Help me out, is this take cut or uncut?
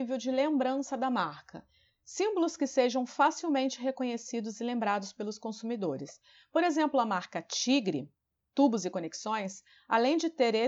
uncut